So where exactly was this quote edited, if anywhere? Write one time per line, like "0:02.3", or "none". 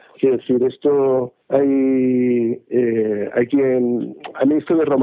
0:01.4